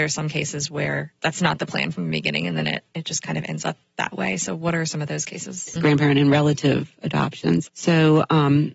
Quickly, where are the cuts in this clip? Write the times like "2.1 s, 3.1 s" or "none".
1.2 s, 5.8 s, 7.7 s